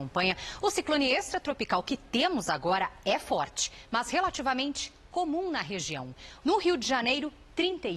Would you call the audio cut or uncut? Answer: cut